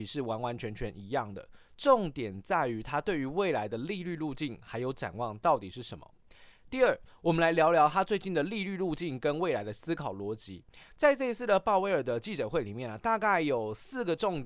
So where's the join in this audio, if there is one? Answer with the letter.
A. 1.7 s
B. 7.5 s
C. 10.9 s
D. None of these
D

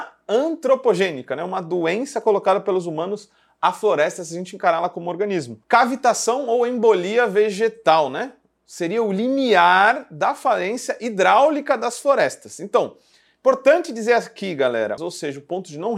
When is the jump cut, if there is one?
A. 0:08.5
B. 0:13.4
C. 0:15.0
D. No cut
C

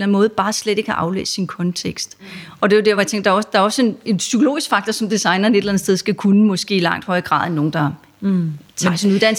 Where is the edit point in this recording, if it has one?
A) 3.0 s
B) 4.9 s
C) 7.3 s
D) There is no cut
D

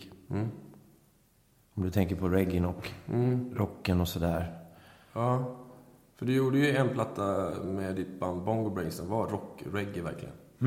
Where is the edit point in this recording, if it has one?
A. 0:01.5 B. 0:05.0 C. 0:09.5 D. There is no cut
A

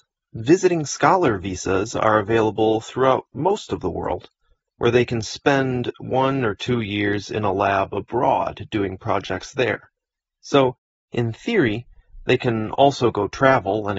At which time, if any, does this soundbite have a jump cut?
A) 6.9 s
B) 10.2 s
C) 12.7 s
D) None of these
D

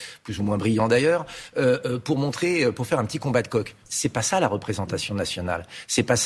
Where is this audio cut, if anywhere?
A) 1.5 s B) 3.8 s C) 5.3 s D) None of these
B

